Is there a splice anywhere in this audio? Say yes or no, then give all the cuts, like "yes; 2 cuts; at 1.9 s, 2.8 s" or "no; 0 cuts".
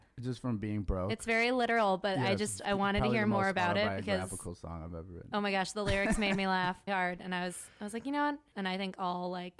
yes; 2 cuts; at 6.9 s, 8.5 s